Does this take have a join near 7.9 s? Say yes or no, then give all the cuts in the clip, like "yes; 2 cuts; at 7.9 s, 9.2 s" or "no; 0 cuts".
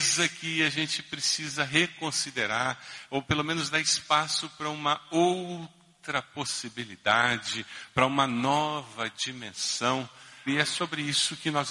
no; 1 cut; at 10.5 s